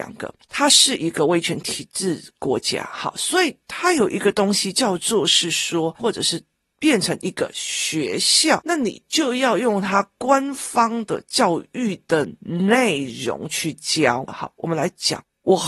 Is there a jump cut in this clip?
yes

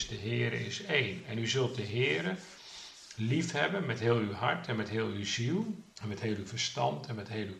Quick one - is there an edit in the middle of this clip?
yes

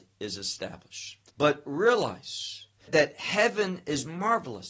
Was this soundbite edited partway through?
yes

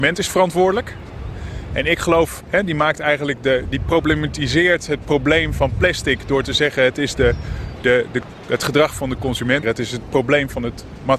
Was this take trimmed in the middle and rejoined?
yes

